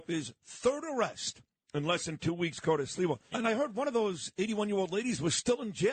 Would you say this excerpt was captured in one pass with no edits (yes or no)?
no